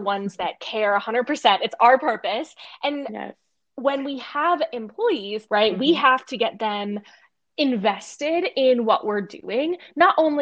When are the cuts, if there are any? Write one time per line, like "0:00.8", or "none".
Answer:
0:05.5